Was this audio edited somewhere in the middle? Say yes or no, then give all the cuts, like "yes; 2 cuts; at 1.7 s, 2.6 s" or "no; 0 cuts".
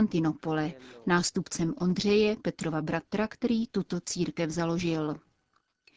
no; 0 cuts